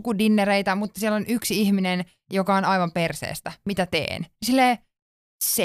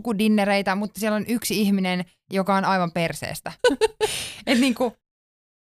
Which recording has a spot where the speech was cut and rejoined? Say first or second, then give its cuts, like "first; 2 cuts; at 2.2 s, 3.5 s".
second; 1 cut; at 3.6 s